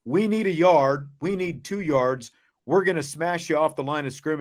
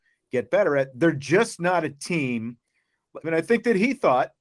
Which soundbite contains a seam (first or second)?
second